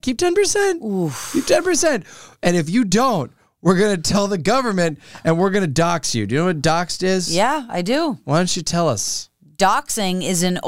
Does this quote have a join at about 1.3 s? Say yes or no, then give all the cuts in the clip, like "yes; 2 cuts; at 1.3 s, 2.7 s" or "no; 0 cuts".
no; 0 cuts